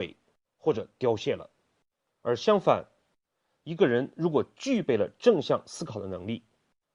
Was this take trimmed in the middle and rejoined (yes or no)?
no